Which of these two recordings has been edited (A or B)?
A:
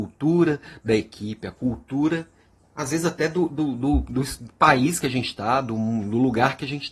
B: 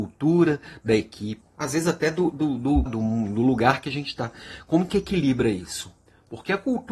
B